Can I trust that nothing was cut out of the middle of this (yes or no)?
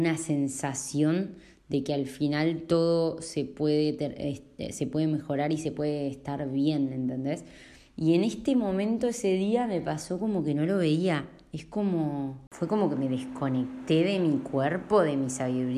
yes